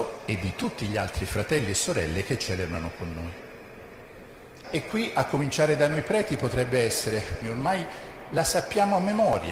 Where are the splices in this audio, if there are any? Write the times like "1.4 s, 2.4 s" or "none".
4.6 s, 7.4 s